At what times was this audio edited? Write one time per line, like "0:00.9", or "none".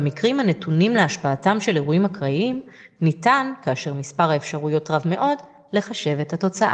none